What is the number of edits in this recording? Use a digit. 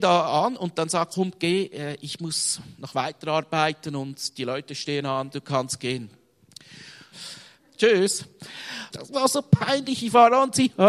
3